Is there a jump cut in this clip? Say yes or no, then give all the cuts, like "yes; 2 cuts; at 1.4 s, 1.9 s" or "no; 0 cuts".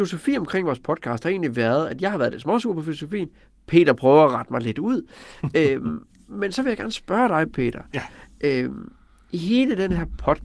no; 0 cuts